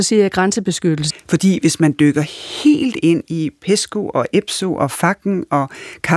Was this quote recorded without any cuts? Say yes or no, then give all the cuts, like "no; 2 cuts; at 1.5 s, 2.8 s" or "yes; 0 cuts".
no; 1 cut; at 1.1 s